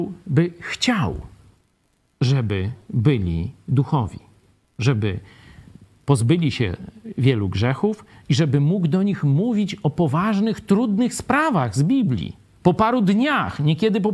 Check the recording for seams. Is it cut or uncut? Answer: cut